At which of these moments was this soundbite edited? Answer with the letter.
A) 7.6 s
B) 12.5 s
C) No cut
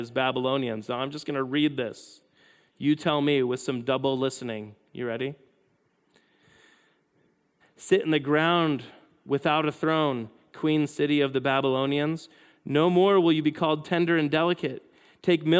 A